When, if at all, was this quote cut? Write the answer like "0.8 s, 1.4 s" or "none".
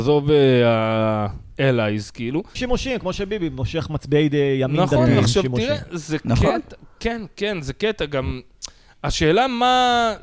2.6 s